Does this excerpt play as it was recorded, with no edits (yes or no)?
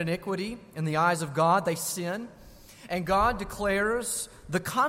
yes